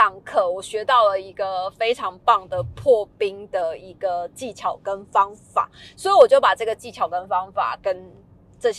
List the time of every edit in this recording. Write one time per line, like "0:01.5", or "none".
none